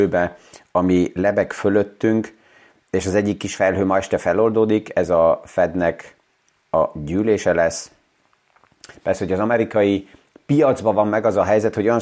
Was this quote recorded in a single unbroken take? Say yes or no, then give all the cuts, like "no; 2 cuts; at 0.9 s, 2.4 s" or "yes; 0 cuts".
no; 1 cut; at 9.0 s